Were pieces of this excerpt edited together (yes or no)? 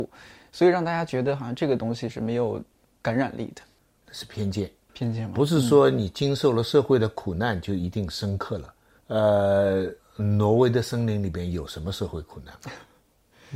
no